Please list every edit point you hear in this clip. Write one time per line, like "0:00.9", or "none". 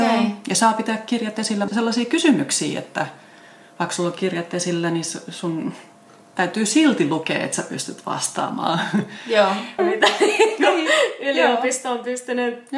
0:01.7
0:09.8